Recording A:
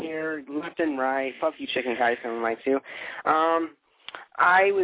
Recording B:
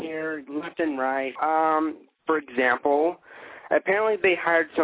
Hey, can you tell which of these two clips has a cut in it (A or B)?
B